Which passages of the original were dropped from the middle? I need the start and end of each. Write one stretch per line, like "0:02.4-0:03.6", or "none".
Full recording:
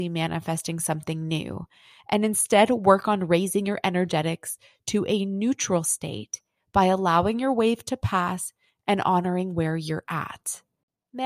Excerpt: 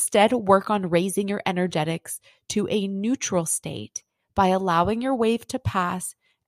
none